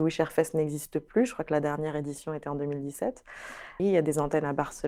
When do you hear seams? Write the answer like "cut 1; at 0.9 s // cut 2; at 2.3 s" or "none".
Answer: cut 1; at 3.8 s